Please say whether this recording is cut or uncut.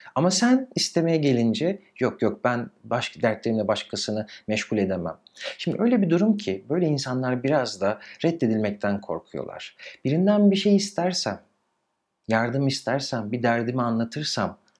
uncut